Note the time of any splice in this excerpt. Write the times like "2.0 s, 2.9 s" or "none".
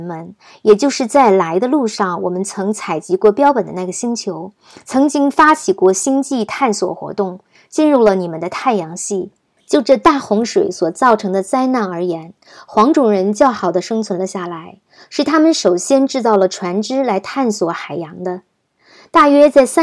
9.6 s

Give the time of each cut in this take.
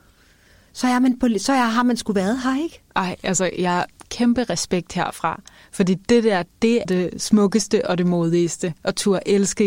6.8 s

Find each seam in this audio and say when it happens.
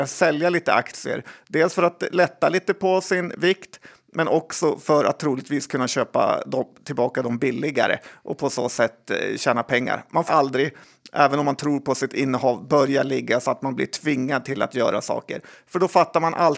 10.3 s

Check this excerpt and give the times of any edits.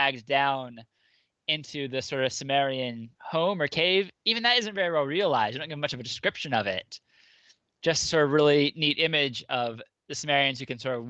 none

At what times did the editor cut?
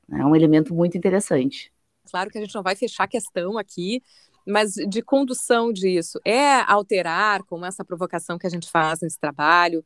2.0 s

